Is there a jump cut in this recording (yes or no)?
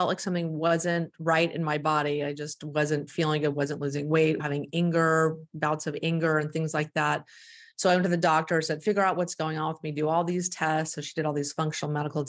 yes